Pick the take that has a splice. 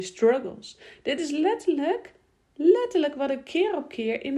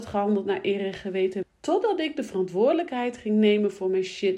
second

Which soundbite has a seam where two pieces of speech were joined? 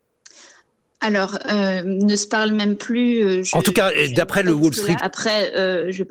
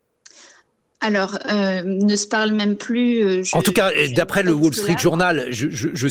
first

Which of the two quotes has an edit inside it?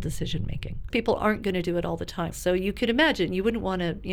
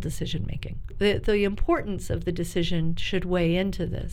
first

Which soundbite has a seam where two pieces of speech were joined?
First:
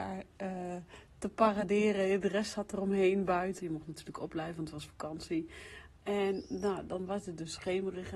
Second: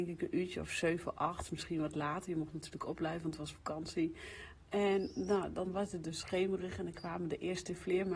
first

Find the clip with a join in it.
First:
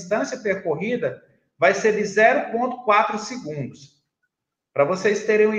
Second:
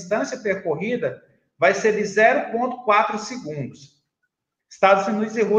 second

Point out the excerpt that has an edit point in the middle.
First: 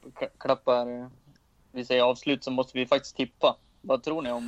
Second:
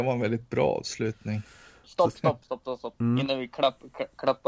second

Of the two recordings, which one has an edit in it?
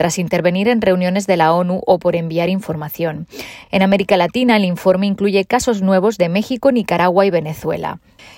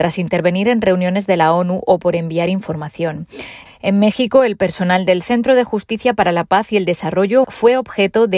second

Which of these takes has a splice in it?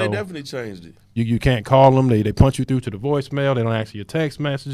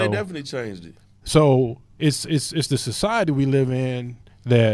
first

